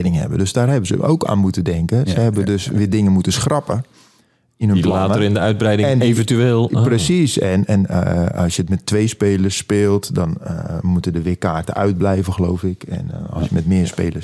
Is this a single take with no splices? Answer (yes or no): yes